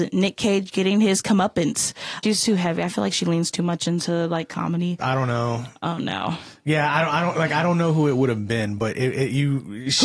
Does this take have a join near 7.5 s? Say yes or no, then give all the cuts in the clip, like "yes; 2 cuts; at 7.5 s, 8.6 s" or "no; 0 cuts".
no; 2 cuts; at 2.2 s, 5.0 s